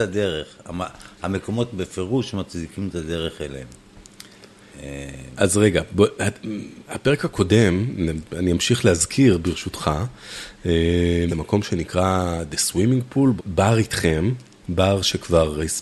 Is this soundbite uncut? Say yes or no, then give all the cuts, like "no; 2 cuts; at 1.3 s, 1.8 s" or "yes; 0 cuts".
no; 2 cuts; at 11.3 s, 13.4 s